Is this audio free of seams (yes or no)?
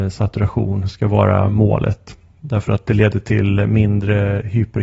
yes